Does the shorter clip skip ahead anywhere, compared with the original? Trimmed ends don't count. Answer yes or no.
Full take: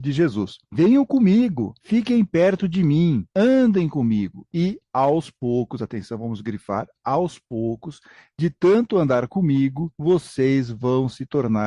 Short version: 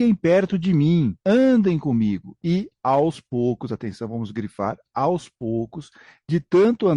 no